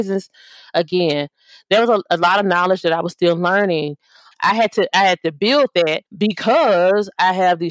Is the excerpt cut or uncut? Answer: cut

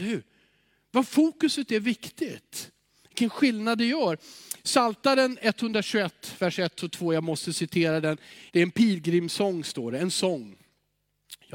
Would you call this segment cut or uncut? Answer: cut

